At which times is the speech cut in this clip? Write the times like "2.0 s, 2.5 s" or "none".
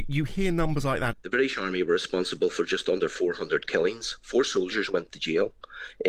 1.1 s